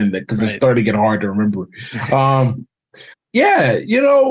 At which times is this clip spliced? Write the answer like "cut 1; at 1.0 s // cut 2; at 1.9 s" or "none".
cut 1; at 3.1 s